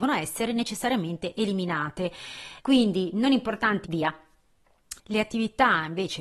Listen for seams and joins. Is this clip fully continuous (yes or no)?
no